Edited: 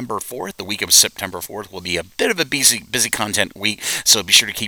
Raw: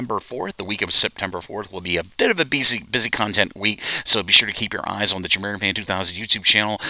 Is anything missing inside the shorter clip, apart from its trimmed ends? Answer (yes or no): no